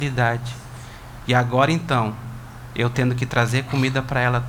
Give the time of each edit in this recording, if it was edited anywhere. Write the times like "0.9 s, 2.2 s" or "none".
1.2 s